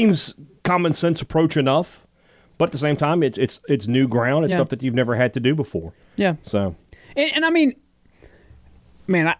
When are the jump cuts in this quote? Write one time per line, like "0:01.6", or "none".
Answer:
none